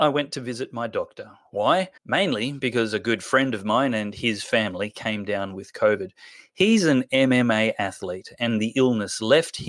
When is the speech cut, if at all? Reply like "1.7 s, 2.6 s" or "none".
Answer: 2.0 s